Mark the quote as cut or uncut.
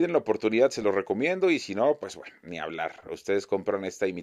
uncut